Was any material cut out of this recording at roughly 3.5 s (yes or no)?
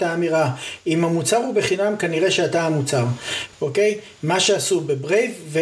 yes